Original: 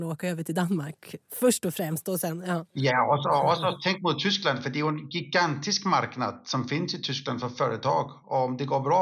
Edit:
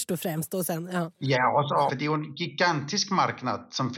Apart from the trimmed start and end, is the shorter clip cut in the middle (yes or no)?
yes